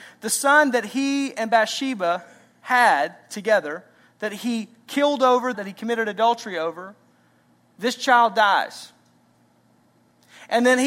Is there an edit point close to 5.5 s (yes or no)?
yes